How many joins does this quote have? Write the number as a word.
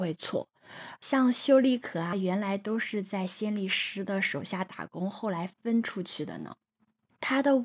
two